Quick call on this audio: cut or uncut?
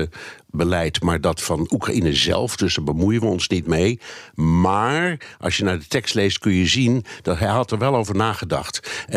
uncut